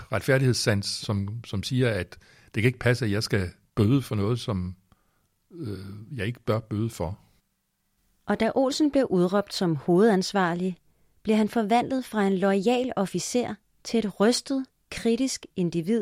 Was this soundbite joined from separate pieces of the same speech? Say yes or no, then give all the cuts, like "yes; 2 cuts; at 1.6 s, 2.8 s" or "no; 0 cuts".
yes; 1 cut; at 1.0 s